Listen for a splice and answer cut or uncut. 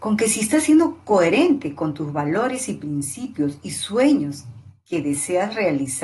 uncut